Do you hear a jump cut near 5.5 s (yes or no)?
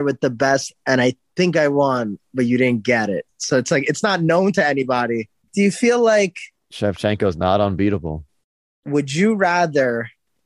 yes